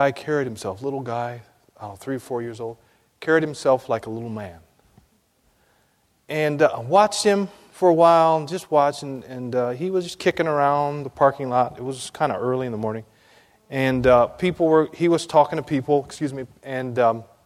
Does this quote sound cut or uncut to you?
uncut